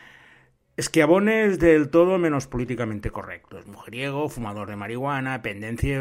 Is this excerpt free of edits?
yes; 0 cuts

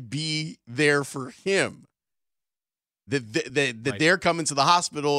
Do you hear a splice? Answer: no; 0 cuts

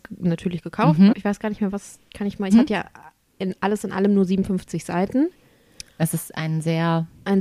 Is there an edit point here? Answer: yes; 2 cuts; at 1.1 s, 2.5 s

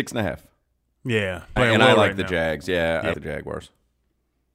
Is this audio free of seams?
no; 2 cuts; at 1.6 s, 3.1 s

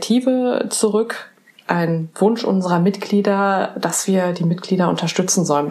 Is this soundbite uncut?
yes; 0 cuts

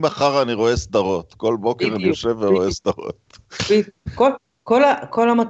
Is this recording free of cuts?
yes; 0 cuts

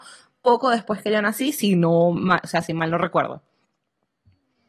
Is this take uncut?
yes; 0 cuts

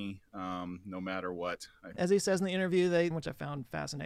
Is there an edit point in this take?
yes; 2 cuts; at 2.0 s, 3.1 s

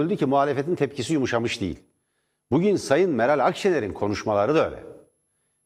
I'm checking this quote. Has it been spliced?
no; 0 cuts

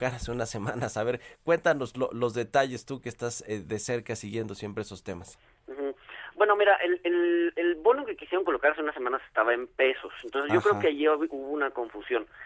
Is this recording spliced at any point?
no; 0 cuts

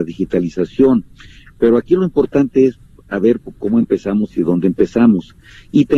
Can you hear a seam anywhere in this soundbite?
no; 0 cuts

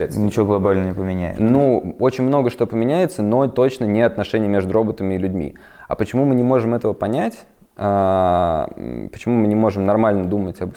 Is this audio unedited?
yes; 0 cuts

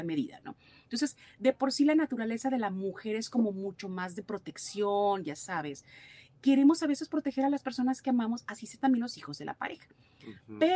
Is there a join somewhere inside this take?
no; 0 cuts

